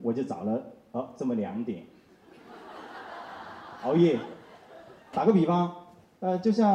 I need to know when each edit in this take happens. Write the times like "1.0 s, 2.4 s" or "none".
5.1 s